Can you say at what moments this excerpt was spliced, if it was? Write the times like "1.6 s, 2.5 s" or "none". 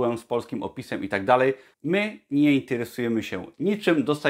1.7 s